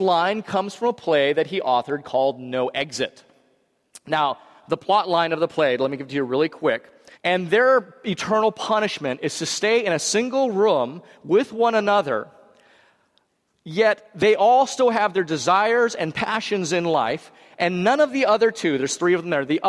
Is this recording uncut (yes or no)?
no